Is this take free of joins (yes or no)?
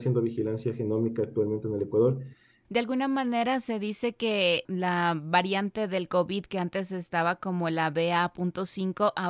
no